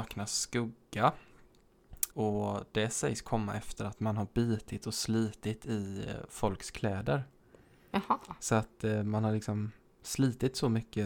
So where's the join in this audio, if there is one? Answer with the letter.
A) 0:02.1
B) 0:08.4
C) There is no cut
A